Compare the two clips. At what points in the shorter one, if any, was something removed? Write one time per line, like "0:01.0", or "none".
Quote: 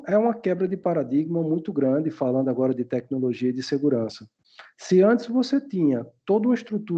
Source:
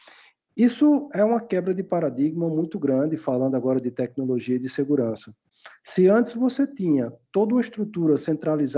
none